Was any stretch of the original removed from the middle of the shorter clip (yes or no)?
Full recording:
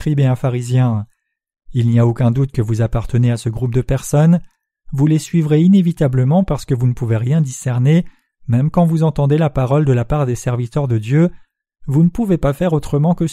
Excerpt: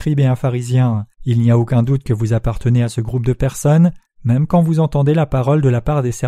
yes